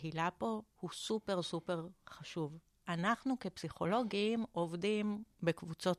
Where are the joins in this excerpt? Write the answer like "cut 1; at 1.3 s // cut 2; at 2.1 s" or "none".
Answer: none